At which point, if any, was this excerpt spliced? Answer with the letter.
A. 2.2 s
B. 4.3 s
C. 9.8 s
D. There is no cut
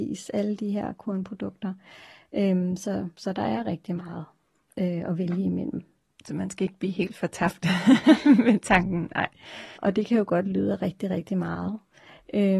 C